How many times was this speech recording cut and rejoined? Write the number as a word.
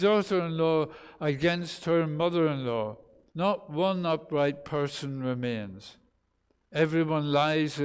one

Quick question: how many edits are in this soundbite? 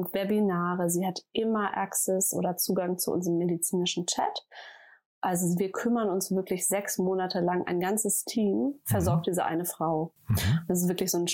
zero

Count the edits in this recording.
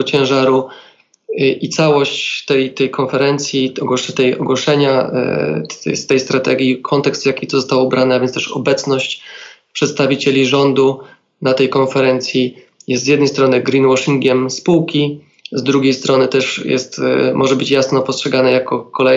zero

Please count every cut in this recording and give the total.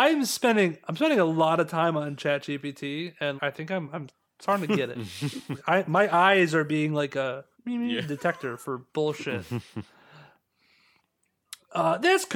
three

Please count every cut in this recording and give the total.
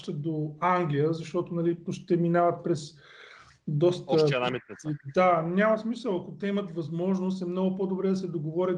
one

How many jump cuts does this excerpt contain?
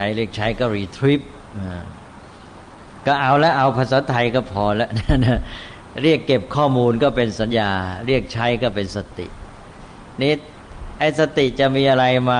one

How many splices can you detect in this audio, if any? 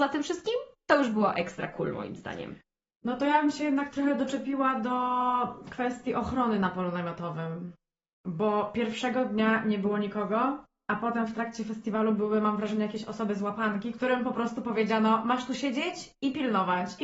zero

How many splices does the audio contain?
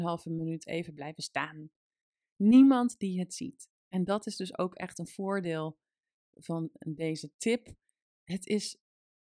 one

